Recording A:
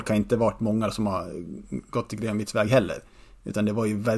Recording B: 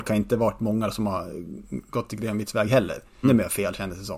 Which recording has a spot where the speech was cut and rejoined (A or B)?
B